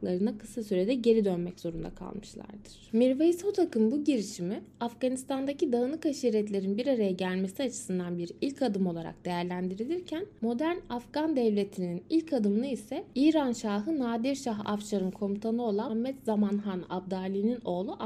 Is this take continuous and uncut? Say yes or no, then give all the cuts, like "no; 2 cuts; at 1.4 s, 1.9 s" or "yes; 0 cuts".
no; 1 cut; at 15.9 s